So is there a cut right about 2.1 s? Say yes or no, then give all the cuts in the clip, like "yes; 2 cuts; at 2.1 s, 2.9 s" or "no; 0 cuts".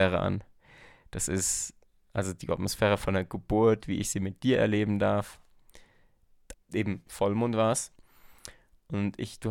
no; 1 cut; at 6.5 s